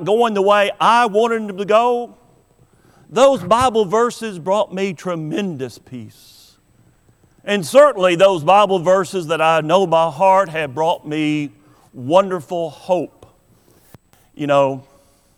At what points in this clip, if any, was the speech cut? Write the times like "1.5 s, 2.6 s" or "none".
none